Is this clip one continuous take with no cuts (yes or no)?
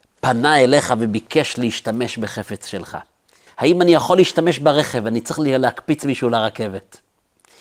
no